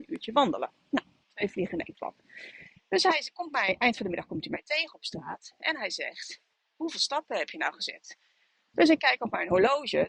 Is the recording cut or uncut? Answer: uncut